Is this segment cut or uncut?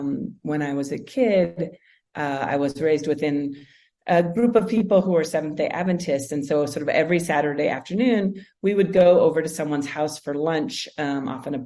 uncut